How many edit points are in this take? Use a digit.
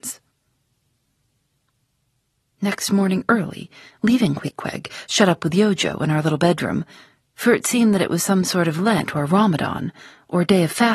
1